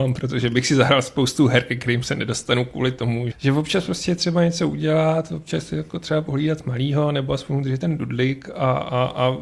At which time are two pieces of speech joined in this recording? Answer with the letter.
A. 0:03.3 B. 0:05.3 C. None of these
A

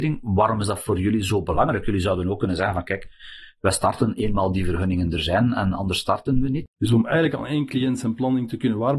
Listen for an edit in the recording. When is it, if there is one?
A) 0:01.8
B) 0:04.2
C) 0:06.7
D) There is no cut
C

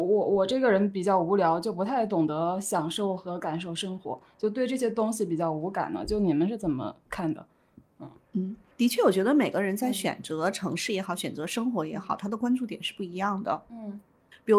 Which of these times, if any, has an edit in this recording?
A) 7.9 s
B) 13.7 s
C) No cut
C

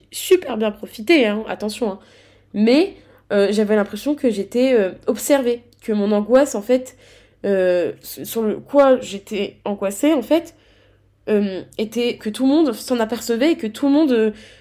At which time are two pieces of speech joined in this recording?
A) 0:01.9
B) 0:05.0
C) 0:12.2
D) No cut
C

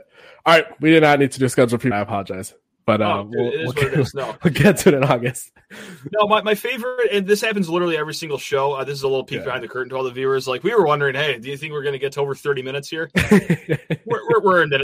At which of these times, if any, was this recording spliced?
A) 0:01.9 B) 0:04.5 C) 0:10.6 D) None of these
A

